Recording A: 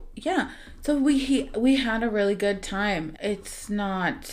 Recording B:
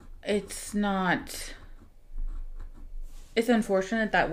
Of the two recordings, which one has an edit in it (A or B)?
A